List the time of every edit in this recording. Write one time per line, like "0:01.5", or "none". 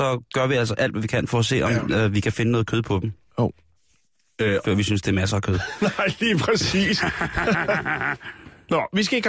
0:04.6